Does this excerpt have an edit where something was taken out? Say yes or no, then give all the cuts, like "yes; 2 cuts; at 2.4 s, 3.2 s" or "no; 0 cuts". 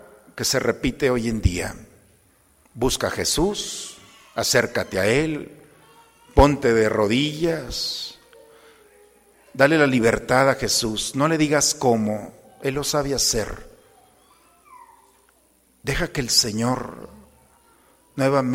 yes; 1 cut; at 2.6 s